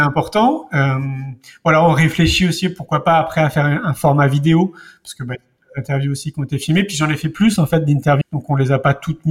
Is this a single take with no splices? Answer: no; 1 cut; at 8.2 s

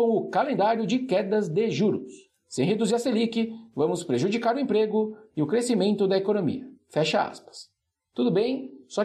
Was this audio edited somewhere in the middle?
no; 0 cuts

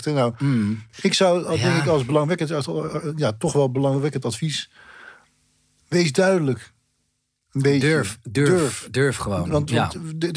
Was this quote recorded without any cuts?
yes; 0 cuts

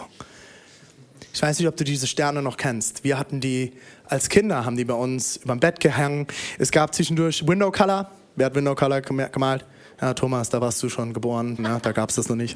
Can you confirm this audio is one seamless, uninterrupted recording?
no; 1 cut; at 11.6 s

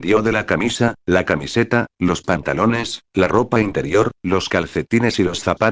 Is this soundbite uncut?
yes; 0 cuts

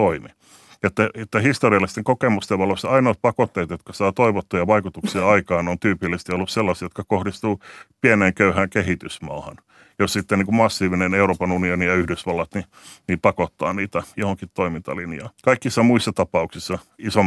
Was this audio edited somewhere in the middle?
yes; 1 cut; at 15.4 s

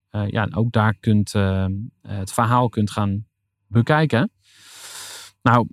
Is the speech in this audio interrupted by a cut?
no; 0 cuts

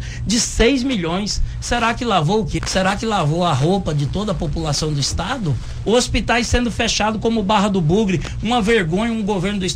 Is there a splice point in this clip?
yes; 2 cuts; at 2.6 s, 5.8 s

